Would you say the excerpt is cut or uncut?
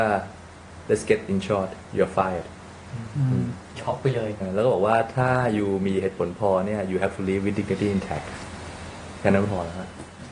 cut